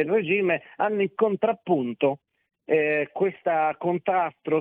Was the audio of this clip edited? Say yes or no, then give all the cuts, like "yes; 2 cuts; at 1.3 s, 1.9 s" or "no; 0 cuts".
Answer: no; 0 cuts